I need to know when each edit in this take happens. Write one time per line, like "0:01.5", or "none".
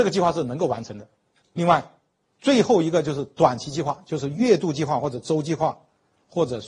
0:01.4